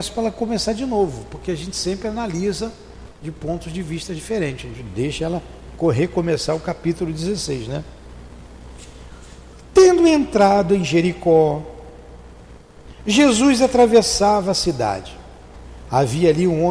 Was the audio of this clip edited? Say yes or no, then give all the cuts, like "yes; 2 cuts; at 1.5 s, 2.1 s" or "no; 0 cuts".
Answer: no; 0 cuts